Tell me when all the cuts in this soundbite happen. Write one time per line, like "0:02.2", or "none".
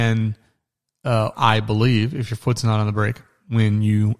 0:01.3